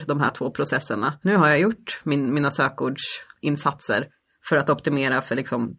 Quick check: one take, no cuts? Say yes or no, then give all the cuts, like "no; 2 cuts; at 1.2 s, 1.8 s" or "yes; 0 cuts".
no; 1 cut; at 1.2 s